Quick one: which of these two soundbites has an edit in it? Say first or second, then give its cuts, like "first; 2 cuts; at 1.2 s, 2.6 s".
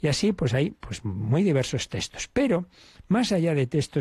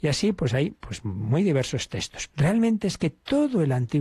second; 1 cut; at 2.3 s